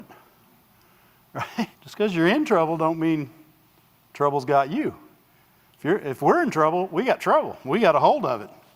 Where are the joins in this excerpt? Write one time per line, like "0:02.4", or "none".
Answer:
0:01.7